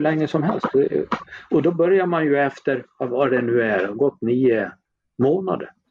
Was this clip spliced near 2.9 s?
no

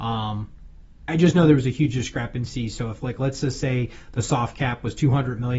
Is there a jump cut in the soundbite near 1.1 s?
yes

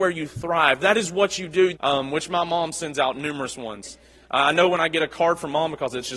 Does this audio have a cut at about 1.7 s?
yes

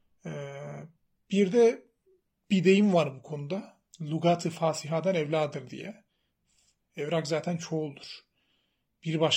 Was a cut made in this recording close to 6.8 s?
yes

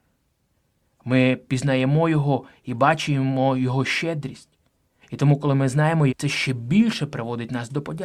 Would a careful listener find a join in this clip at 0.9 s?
no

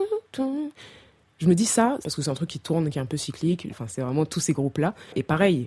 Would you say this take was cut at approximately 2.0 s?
yes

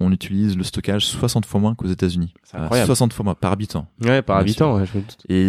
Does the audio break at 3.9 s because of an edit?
no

